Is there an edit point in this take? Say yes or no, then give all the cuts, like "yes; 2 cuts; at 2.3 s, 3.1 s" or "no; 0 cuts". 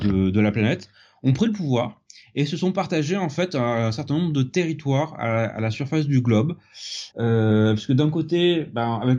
yes; 1 cut; at 7.1 s